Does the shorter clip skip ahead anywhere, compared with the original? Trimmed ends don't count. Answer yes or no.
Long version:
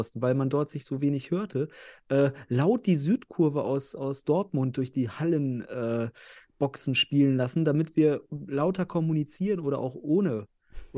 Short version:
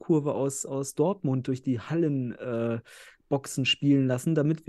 no